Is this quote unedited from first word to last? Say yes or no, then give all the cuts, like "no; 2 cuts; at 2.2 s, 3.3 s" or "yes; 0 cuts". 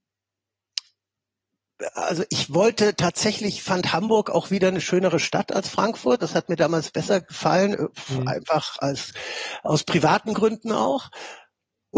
yes; 0 cuts